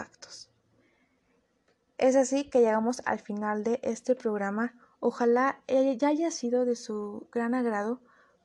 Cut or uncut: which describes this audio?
uncut